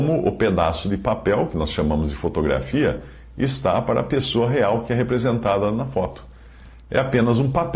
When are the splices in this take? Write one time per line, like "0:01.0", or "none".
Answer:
none